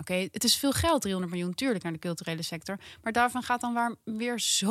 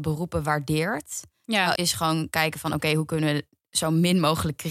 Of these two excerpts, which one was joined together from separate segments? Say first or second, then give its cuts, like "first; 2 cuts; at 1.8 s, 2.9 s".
second; 1 cut; at 1.8 s